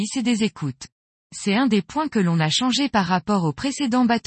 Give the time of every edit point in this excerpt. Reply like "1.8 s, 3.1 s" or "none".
1.3 s